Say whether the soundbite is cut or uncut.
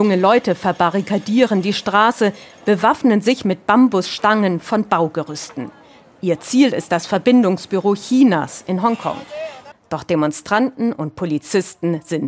cut